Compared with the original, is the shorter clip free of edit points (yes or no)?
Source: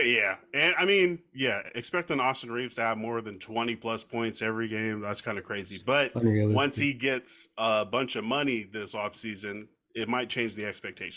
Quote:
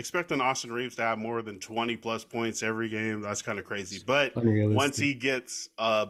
yes